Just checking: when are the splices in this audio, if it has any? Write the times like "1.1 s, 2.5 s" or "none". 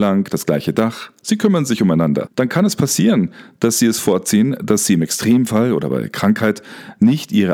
2.3 s